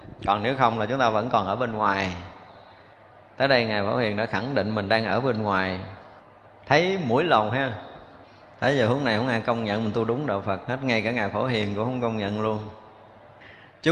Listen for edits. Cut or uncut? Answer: uncut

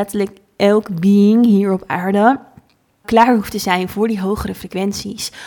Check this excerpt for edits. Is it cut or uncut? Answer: cut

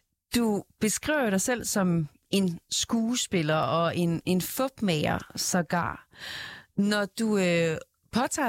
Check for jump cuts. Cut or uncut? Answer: uncut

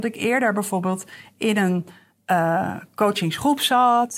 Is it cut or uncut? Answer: uncut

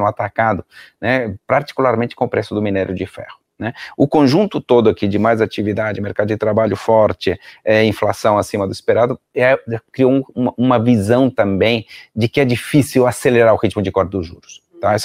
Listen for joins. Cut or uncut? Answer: uncut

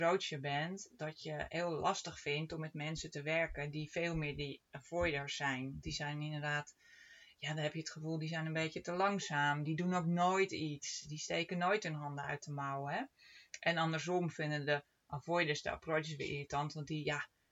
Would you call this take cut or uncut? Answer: uncut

